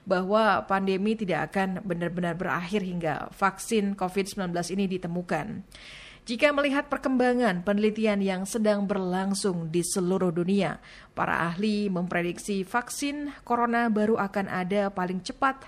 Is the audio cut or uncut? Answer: uncut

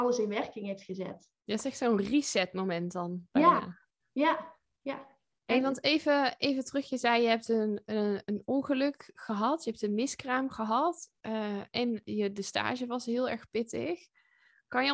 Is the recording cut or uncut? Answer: uncut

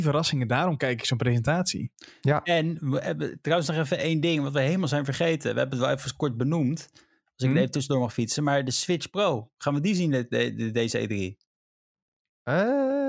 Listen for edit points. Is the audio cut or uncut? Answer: uncut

